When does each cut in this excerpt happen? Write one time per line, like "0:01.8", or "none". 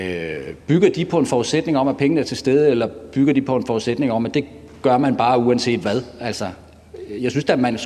none

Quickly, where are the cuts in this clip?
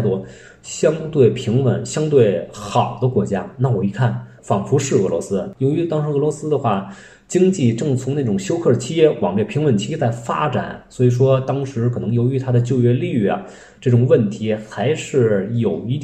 none

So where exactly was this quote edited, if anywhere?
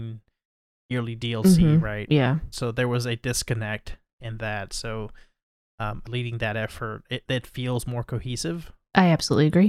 0:06.1

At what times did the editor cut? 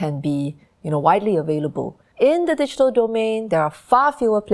0:02.1

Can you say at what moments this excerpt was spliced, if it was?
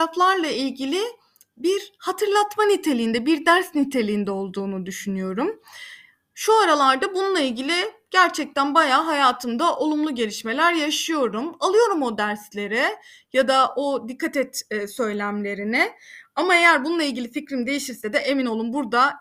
none

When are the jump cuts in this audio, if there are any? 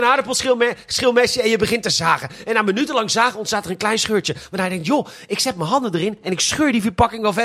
none

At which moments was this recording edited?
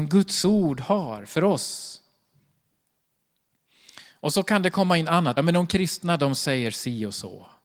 none

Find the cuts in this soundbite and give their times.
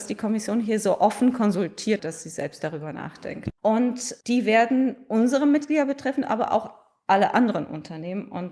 0:02.0
0:03.5

